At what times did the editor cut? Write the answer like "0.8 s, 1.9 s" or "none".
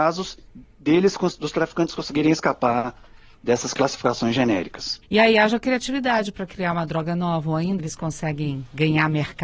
5.0 s, 7.8 s

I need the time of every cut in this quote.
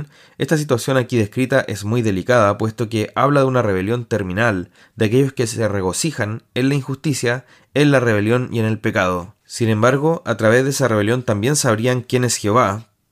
none

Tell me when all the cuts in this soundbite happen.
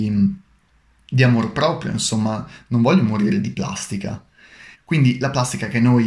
4.7 s

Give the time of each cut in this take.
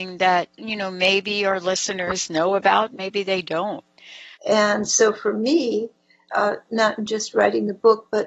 4.3 s, 6.3 s

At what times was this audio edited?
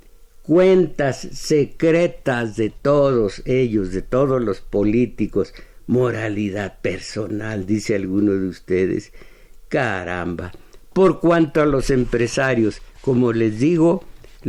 none

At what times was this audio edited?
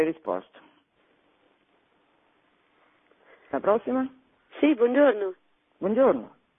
none

